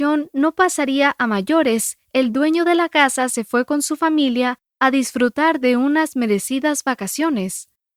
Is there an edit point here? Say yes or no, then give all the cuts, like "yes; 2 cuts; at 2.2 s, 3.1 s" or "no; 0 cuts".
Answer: no; 0 cuts